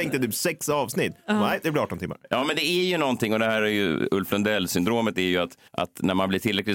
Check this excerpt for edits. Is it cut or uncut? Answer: cut